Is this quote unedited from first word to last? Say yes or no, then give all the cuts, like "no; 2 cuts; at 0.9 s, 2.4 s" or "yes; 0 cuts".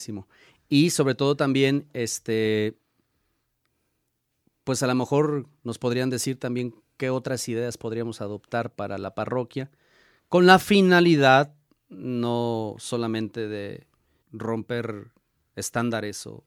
no; 1 cut; at 14.2 s